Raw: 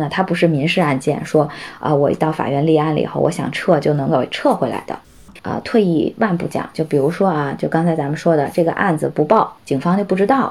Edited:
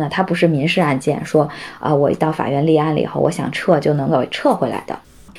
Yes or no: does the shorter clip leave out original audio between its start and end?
no